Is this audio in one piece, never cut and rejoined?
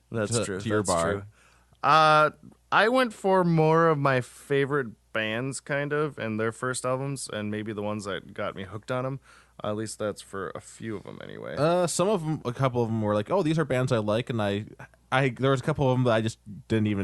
no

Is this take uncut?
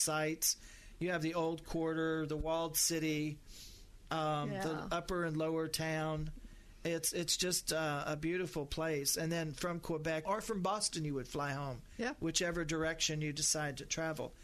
no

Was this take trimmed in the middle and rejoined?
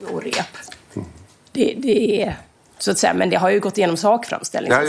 no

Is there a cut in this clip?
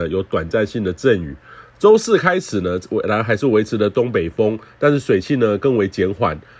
no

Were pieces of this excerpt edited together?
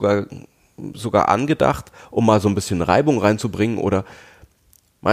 no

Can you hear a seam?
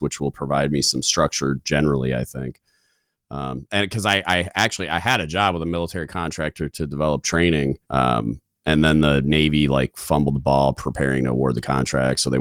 yes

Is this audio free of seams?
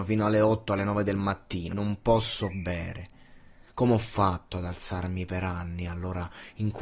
no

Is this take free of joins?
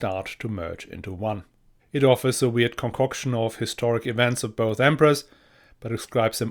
no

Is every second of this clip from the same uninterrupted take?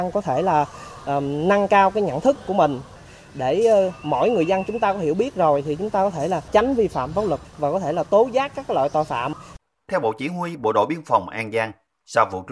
yes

